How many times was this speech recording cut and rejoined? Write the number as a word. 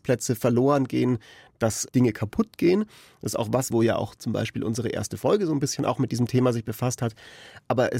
one